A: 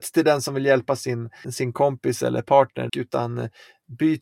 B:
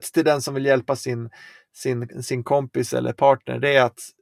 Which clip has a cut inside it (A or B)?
A